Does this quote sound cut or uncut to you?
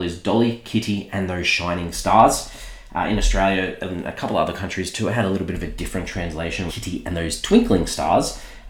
cut